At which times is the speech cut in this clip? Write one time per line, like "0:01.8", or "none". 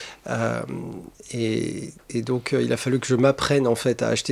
none